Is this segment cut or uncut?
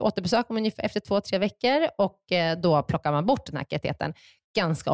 uncut